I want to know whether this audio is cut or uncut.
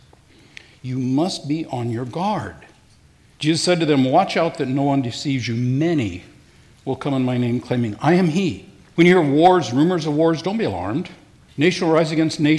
cut